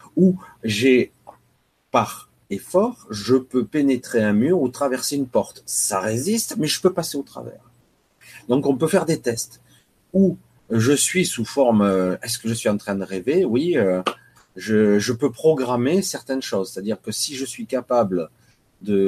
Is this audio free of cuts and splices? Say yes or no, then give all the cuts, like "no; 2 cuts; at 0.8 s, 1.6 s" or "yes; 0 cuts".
yes; 0 cuts